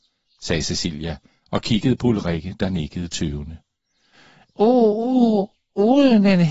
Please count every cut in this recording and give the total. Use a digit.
0